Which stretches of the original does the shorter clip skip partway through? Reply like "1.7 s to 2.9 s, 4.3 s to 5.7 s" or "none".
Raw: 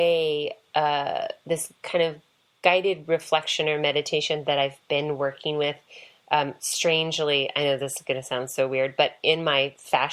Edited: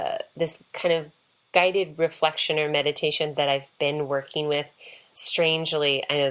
6.2 s to 6.6 s